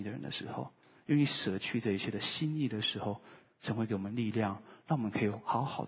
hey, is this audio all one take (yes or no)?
no